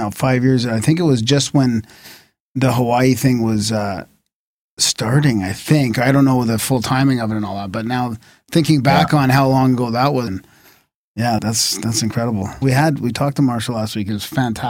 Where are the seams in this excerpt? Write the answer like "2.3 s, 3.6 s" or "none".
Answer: 10.3 s, 11.4 s, 12.6 s